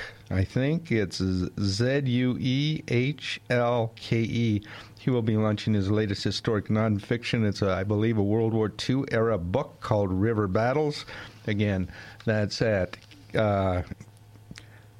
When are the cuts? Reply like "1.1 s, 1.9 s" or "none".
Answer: 4.9 s